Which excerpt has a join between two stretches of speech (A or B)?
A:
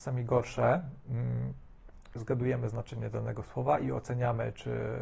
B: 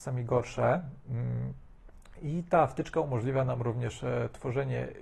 A